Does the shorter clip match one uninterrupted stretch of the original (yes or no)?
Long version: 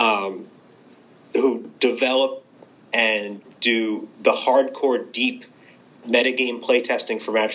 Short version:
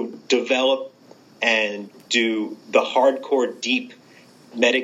yes